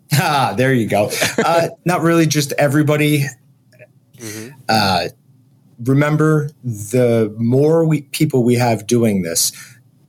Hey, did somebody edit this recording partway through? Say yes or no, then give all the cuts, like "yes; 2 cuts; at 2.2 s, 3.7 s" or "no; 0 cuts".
yes; 2 cuts; at 1.8 s, 4.1 s